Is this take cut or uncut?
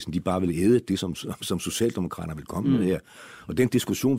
uncut